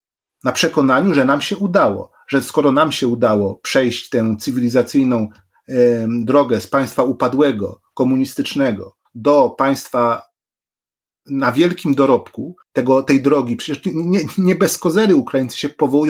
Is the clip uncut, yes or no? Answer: no